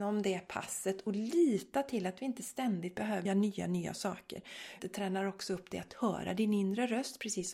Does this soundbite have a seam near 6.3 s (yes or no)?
no